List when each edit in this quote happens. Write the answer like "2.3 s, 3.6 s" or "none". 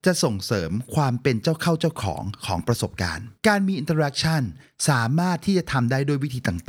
3.4 s